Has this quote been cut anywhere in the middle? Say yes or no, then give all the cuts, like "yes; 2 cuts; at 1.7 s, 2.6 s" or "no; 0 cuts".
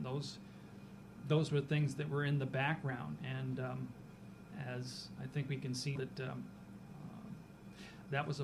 yes; 2 cuts; at 3.2 s, 6.0 s